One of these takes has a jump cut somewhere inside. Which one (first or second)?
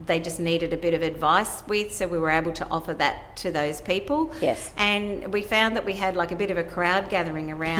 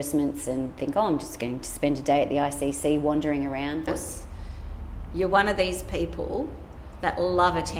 second